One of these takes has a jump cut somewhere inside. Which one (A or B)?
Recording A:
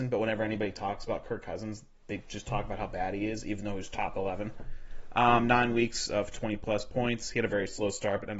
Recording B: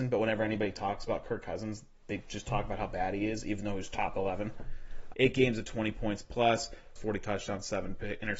B